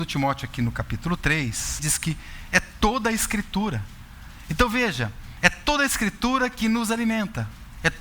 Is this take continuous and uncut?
no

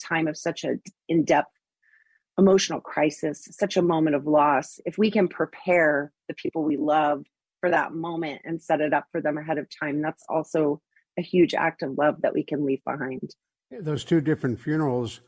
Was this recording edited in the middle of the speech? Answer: no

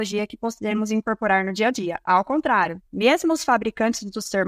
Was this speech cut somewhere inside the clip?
yes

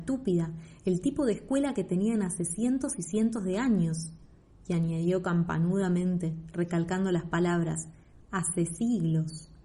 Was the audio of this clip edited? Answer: no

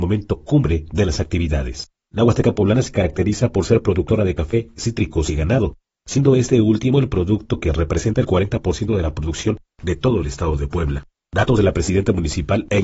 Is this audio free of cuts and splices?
yes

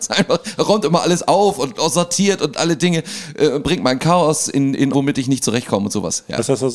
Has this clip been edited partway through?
yes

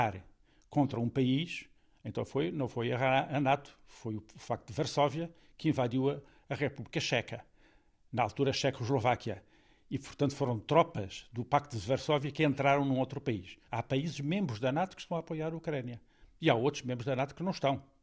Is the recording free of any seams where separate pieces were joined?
no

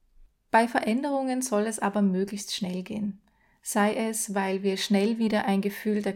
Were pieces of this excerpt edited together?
no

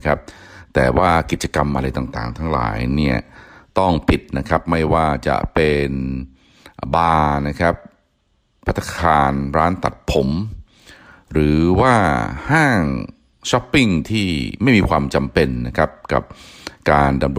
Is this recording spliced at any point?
no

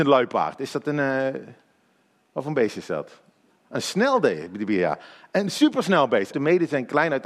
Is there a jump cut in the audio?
yes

